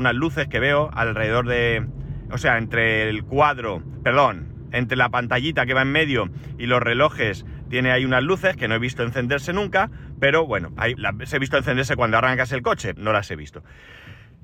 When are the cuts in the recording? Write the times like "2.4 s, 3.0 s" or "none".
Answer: 11.0 s, 13.0 s